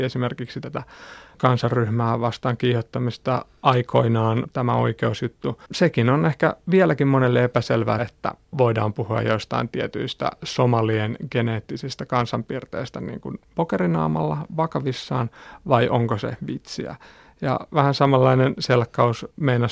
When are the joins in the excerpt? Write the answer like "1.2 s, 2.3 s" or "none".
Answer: 5.7 s, 8.0 s